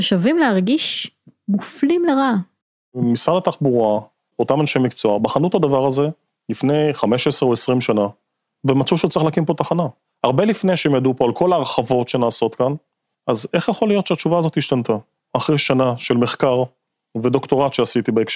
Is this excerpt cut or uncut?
uncut